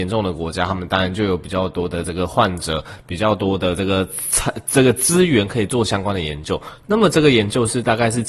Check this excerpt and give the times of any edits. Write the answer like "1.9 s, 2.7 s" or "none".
none